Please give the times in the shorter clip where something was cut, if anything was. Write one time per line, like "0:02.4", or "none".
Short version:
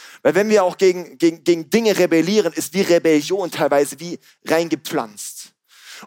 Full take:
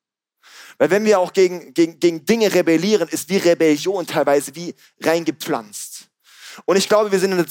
none